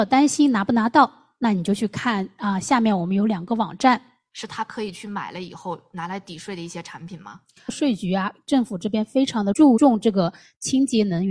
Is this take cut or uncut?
cut